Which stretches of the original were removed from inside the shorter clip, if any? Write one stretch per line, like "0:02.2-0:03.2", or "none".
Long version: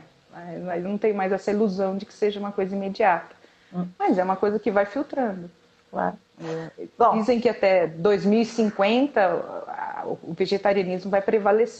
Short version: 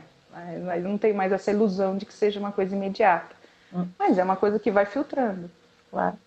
none

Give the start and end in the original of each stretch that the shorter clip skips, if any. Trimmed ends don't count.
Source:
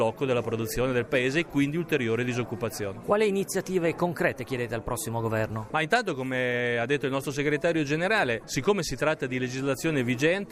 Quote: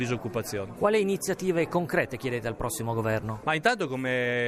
none

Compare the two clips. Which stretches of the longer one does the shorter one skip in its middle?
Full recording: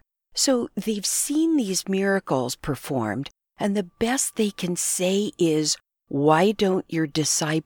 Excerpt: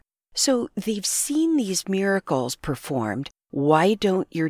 0:03.4-0:06.0

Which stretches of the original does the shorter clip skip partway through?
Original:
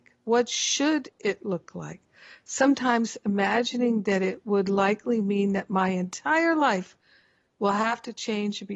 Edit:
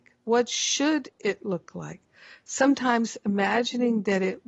none

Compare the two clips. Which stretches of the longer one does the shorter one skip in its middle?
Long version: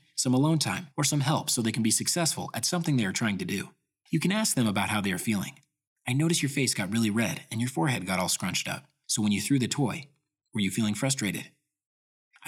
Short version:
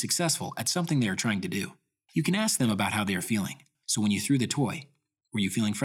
0:05.7-0:09.0

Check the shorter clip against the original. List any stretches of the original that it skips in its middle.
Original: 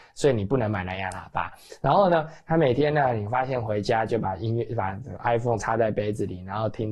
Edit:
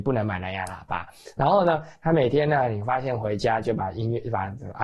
none

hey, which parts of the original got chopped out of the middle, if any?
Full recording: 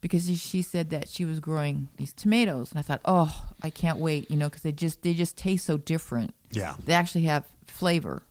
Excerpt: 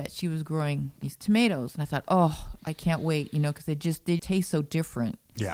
0:05.2-0:05.3

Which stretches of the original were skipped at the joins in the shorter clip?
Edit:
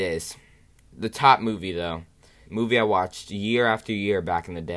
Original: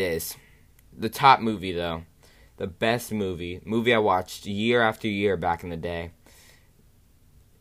0:02.4-0:03.6

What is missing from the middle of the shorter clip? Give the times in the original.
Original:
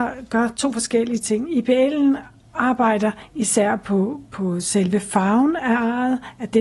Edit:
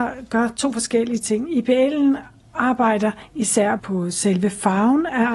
0:03.8-0:04.3

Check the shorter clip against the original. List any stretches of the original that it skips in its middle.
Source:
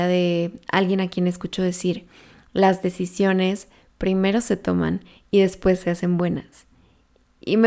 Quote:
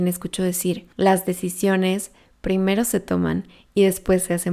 0:02.1-0:02.5

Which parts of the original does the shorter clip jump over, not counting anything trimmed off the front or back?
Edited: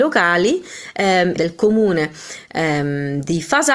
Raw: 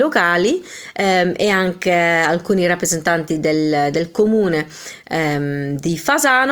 0:01.4-0:03.9

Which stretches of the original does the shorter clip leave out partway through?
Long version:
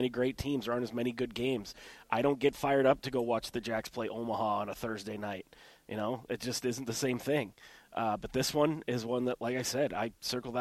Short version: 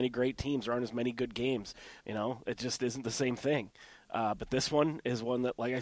0:02.0-0:05.8

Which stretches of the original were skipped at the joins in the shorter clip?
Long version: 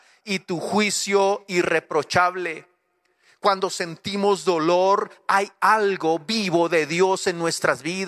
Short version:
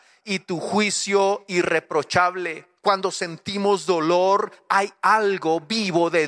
0:02.8-0:03.4

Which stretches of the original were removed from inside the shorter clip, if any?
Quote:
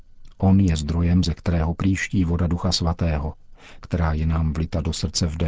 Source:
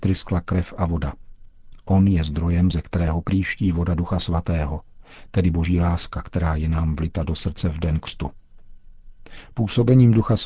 0:05.3-0:06.2

